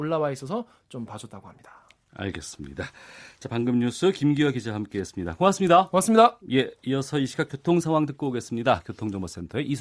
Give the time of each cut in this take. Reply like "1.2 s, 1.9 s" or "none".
none